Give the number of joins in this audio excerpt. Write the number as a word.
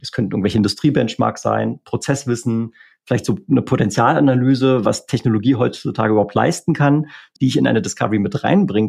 one